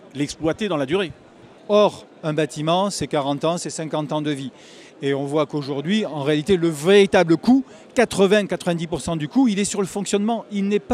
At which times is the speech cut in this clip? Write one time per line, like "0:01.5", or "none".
0:01.6